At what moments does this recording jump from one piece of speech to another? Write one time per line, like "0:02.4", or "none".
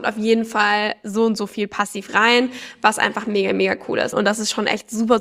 0:04.1

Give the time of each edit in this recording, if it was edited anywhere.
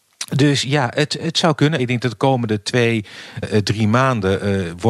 0:01.8
0:03.4

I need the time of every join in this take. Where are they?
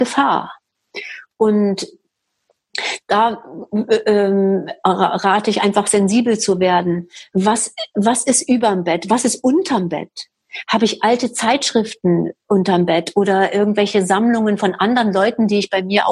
none

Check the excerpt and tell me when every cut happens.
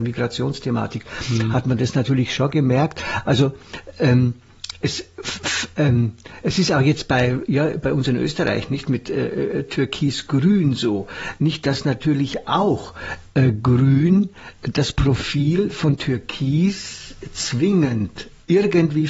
none

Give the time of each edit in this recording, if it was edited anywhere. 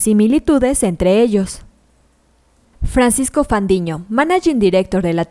none

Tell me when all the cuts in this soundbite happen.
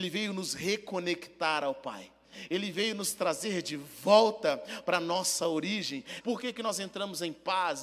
0:06.2

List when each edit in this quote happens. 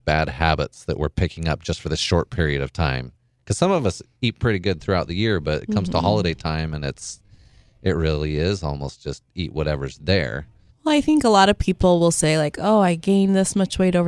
0:10.7

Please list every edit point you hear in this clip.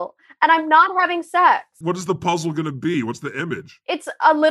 0:01.8

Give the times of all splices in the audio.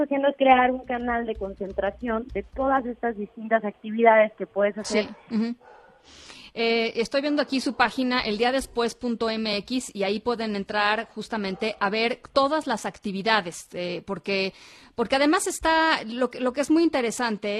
0:05.3

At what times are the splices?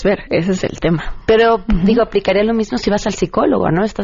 none

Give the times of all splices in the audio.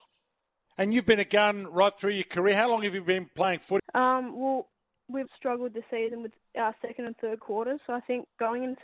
0:03.8
0:05.3

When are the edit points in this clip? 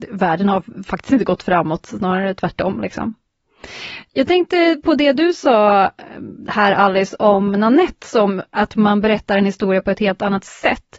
none

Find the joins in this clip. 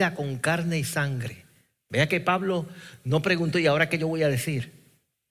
none

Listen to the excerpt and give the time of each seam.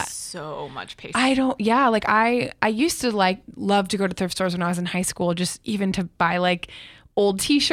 0:01.1

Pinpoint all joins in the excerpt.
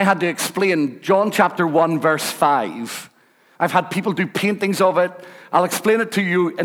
0:03.5

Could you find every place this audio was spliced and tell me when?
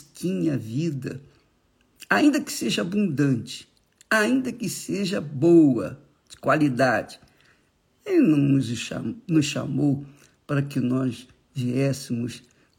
none

